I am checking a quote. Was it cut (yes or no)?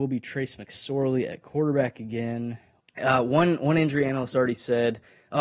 yes